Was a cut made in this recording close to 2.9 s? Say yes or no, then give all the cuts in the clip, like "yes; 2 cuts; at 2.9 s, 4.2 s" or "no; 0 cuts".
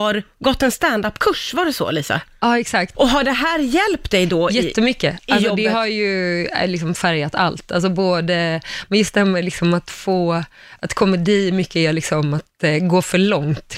yes; 1 cut; at 2.9 s